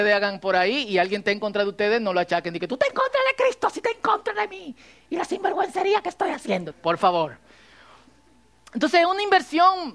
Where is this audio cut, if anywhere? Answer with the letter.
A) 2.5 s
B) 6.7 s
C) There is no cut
B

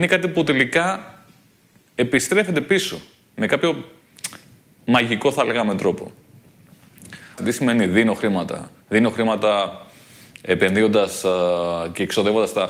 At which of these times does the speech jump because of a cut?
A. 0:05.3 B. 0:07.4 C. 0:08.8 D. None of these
B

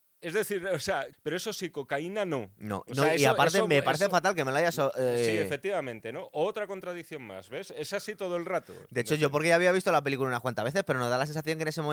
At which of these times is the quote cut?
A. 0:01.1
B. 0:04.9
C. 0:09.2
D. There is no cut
A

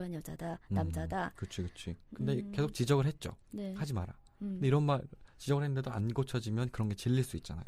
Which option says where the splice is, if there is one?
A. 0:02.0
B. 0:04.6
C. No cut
A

